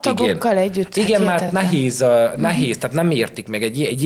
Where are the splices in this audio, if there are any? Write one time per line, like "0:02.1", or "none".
none